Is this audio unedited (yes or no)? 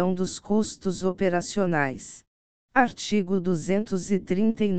no